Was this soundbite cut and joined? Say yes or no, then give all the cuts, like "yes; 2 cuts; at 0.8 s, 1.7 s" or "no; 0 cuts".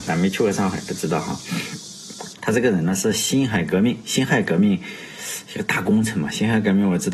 yes; 1 cut; at 2.3 s